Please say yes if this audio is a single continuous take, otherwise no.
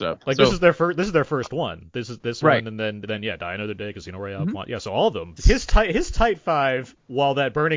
no